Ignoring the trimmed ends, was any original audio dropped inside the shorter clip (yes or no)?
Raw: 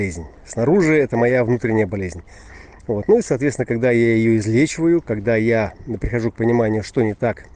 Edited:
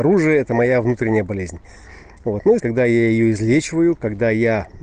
yes